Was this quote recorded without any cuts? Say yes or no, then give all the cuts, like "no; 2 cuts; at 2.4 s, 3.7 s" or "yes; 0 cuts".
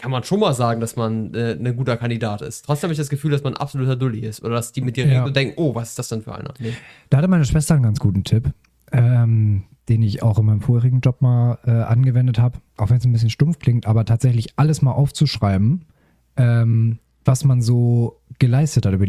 yes; 0 cuts